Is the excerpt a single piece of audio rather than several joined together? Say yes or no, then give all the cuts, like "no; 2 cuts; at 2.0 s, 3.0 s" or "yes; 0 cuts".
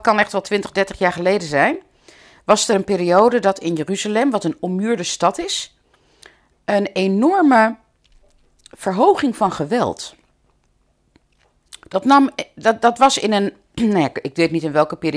yes; 0 cuts